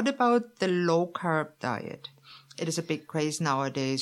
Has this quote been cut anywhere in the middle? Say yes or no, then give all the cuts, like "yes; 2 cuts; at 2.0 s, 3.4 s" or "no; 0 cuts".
no; 0 cuts